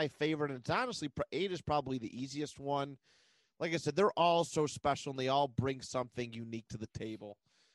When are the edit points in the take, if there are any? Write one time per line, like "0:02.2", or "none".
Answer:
none